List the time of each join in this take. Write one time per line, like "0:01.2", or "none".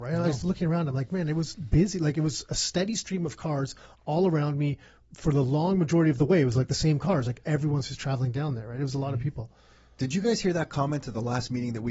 none